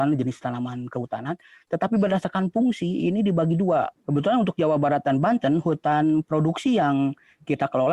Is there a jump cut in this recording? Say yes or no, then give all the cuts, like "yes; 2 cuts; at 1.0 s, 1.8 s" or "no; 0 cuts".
yes; 1 cut; at 4.0 s